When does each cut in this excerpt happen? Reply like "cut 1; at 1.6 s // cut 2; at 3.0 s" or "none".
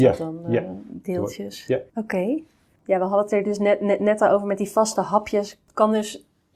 cut 1; at 1.9 s